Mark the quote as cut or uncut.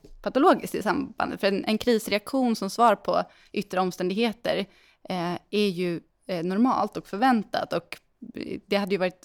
uncut